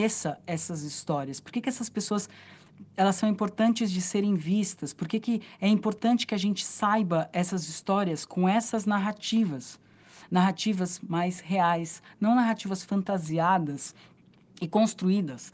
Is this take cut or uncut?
uncut